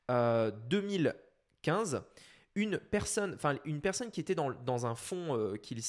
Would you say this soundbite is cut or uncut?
uncut